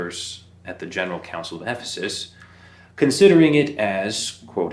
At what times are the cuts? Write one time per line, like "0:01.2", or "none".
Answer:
none